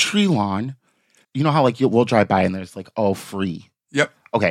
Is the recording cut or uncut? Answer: cut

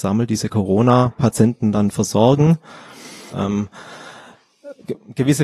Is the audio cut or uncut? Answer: cut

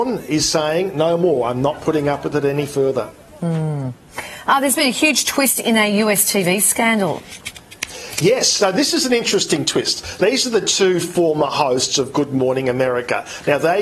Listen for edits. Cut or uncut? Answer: cut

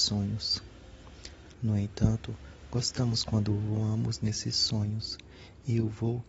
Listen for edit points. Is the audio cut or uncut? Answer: cut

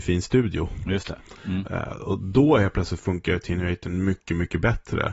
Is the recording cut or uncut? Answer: cut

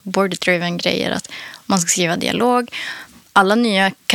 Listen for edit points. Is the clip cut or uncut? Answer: uncut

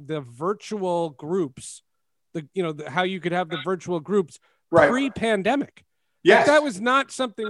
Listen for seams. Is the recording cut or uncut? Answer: uncut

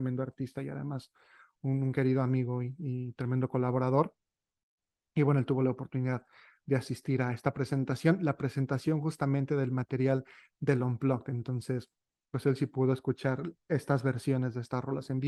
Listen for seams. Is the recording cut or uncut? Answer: uncut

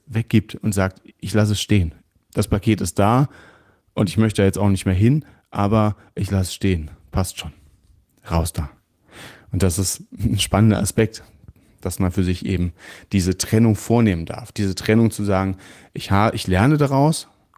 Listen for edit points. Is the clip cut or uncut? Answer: uncut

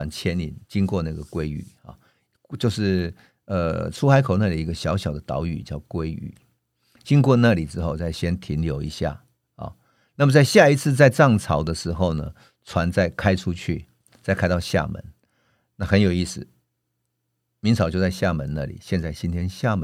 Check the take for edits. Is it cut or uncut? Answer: uncut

